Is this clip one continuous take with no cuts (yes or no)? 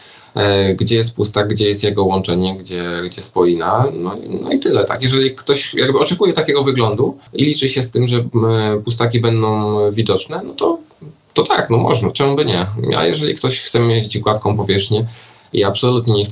no